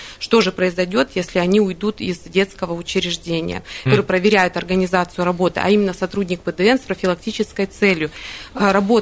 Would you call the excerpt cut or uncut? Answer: cut